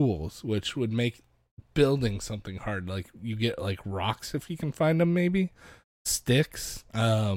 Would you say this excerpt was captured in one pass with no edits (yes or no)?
yes